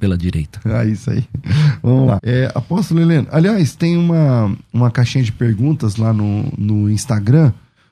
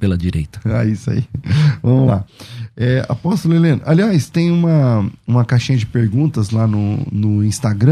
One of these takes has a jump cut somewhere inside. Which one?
first; 1 cut; at 2.2 s

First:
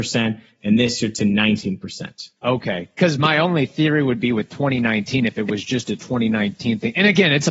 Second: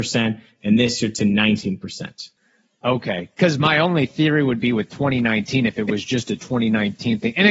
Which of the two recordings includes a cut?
first; 1 cut; at 2.4 s

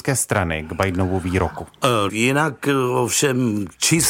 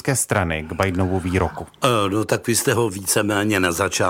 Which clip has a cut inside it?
first; 1 cut; at 2.1 s

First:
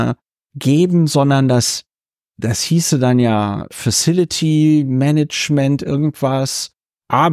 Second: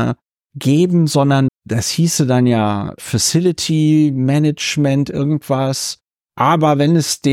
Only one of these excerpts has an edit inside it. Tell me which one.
second; 1 cut; at 1.5 s

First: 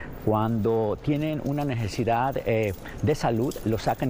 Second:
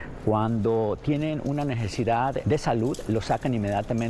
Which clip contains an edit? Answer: second; 1 cut; at 2.4 s

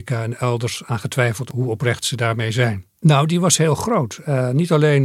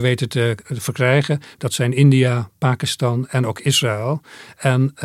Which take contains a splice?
first; 1 cut; at 3.0 s

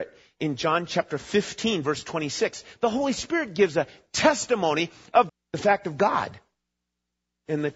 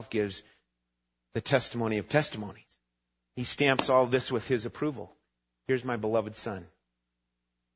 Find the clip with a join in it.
first; 1 cut; at 5.3 s

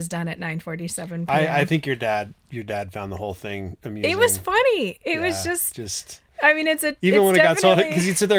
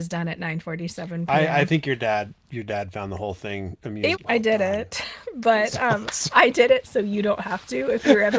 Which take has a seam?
second; 1 cut; at 4.1 s

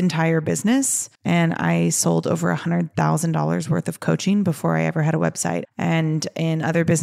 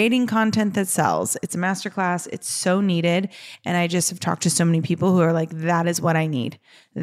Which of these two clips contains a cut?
first; 2 cuts; at 1.2 s, 5.7 s

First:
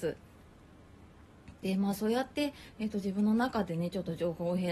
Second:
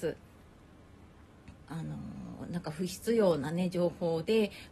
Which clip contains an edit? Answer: second; 1 cut; at 1.6 s

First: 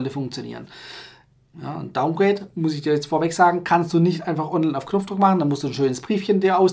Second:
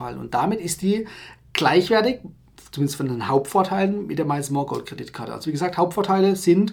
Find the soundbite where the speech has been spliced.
first; 1 cut; at 1.5 s

